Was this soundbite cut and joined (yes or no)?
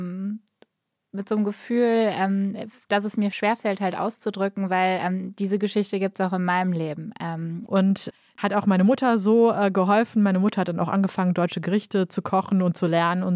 yes